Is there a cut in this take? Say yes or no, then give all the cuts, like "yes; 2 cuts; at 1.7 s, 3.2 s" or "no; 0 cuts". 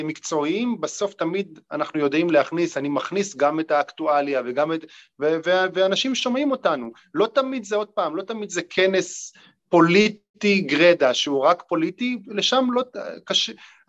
no; 0 cuts